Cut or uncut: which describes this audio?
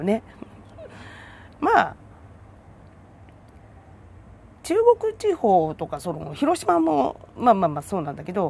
cut